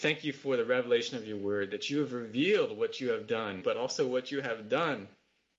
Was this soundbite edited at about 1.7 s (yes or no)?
no